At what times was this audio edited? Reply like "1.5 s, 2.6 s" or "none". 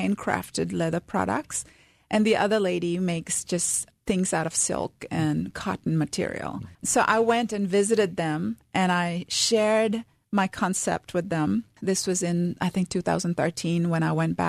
6.7 s, 11.8 s